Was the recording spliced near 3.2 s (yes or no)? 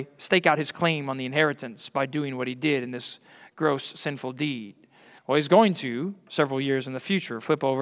no